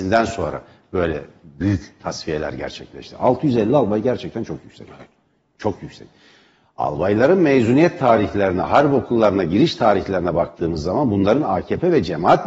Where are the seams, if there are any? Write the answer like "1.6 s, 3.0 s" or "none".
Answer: none